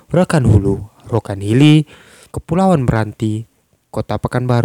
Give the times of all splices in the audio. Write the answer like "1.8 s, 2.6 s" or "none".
2.3 s